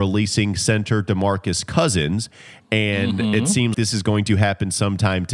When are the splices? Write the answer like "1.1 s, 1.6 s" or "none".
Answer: 3.7 s